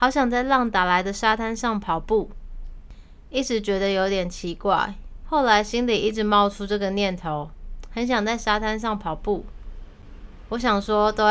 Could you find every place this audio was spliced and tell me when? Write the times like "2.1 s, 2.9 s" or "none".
5.2 s